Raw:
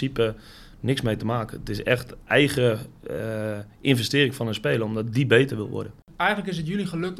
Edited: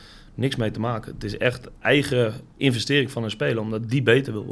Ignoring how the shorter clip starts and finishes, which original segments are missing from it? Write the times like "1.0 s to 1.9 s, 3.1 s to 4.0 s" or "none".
3.0 s to 3.8 s